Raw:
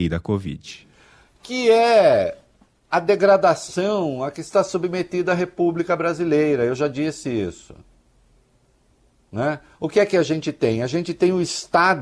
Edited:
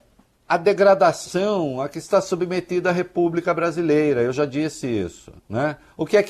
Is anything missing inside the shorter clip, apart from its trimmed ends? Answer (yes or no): yes